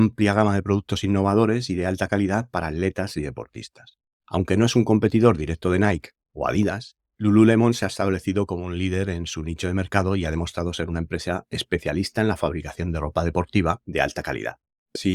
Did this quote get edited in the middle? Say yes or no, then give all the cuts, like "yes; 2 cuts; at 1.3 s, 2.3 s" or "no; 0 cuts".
no; 0 cuts